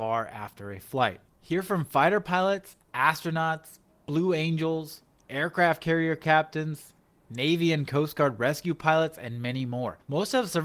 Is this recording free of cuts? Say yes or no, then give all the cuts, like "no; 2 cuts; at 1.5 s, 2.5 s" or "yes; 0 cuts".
yes; 0 cuts